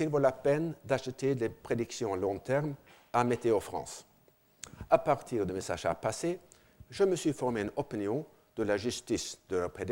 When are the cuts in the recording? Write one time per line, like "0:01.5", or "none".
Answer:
none